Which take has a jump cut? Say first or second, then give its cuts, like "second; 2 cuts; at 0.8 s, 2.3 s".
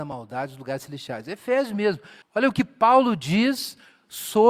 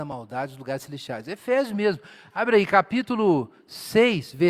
first; 1 cut; at 2.2 s